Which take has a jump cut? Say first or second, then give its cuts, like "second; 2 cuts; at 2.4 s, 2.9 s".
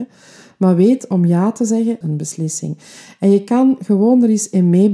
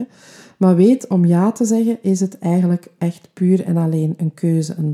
first; 1 cut; at 2.0 s